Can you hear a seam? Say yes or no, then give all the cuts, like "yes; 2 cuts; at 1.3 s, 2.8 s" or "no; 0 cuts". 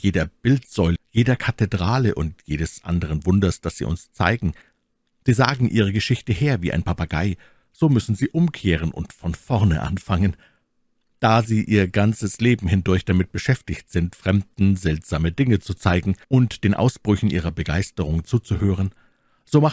yes; 3 cuts; at 1.0 s, 7.6 s, 16.2 s